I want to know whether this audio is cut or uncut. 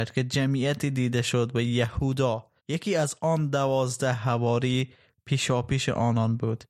cut